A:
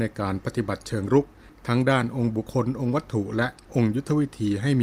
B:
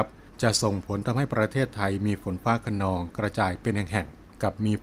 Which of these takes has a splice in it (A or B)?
A